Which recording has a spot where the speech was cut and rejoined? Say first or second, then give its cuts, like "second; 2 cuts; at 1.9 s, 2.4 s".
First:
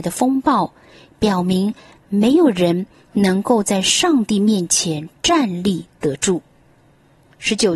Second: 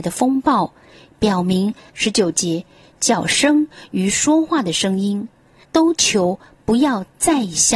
second; 2 cuts; at 1.9 s, 5.6 s